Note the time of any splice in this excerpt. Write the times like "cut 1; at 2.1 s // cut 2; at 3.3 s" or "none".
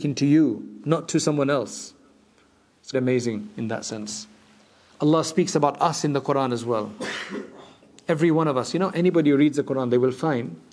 cut 1; at 2.9 s // cut 2; at 4.9 s